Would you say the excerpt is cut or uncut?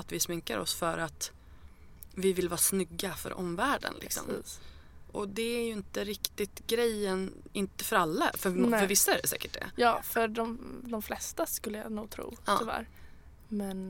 uncut